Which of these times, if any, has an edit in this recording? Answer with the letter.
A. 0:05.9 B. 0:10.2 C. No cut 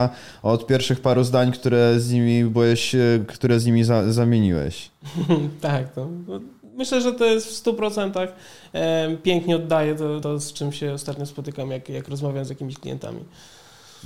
B